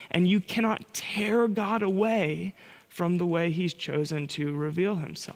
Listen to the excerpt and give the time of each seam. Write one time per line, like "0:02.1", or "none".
none